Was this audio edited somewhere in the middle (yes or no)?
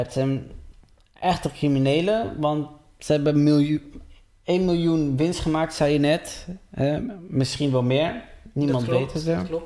no